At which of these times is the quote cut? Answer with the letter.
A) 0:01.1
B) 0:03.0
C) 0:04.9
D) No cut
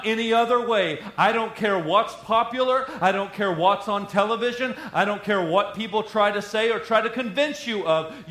D